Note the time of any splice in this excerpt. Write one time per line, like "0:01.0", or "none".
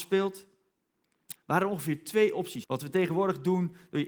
0:01.4
0:02.6